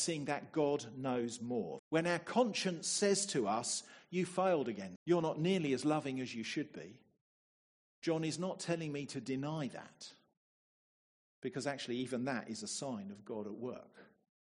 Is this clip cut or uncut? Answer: cut